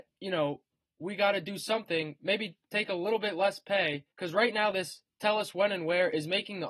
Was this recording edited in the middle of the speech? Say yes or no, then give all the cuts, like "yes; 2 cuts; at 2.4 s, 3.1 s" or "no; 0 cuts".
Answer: yes; 1 cut; at 4.1 s